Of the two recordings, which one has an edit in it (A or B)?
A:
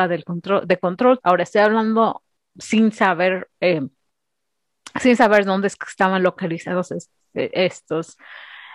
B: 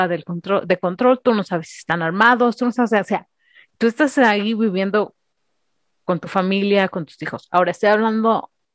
A